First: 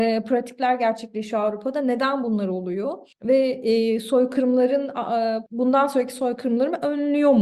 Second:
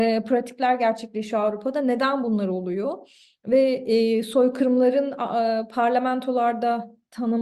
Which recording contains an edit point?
first; 2 cuts; at 3.1 s, 5.5 s

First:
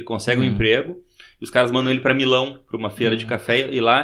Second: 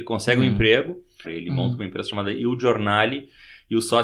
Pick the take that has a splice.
second; 1 cut; at 1.2 s

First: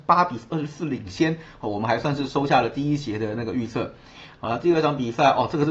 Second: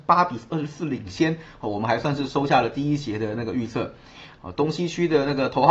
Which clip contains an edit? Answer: second; 1 cut; at 4.4 s

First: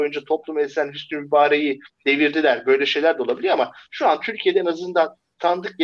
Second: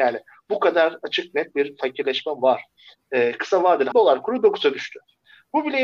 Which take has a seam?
second; 1 cut; at 3.9 s

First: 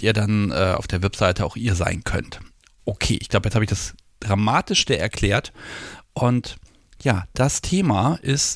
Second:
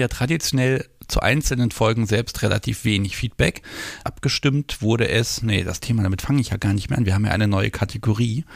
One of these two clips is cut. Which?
second; 1 cut; at 4.0 s

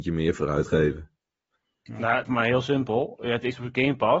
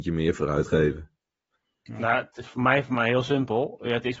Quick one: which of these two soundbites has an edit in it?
first; 1 cut; at 2.2 s

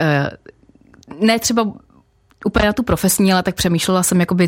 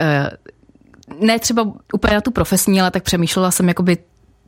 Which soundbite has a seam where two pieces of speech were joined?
second; 1 cut; at 1.8 s

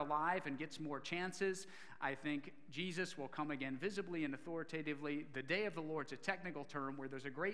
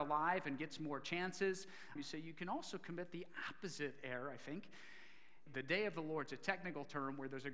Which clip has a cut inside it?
second; 2 cuts; at 2.0 s, 5.5 s

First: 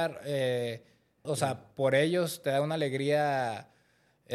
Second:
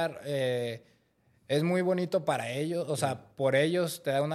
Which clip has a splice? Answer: first; 1 cut; at 1.2 s

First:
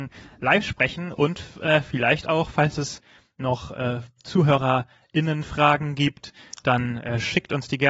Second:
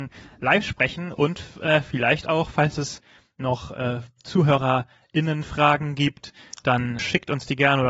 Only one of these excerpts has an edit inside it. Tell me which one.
second; 1 cut; at 7.0 s

